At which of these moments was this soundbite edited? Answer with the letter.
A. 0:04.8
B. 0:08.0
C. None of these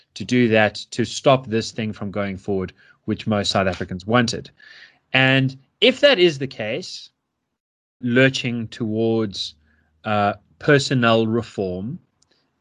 B